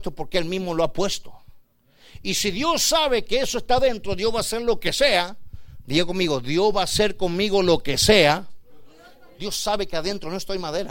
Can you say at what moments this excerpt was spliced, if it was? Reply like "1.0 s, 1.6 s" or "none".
9.4 s